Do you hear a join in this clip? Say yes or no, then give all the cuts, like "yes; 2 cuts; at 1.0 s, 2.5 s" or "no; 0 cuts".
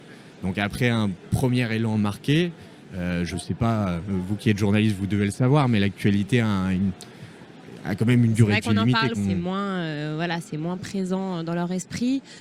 yes; 1 cut; at 9.1 s